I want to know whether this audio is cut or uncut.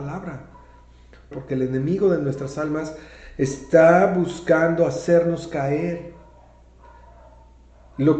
cut